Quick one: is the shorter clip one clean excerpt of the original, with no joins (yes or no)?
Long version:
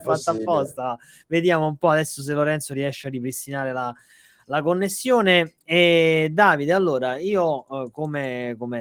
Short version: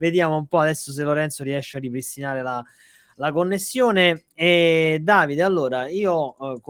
yes